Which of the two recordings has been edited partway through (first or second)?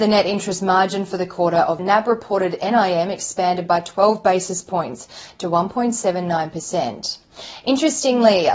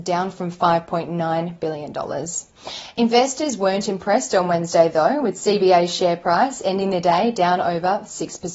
first